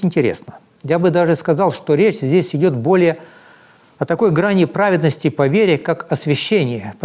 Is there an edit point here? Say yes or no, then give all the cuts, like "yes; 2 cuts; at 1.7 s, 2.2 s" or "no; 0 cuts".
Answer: no; 0 cuts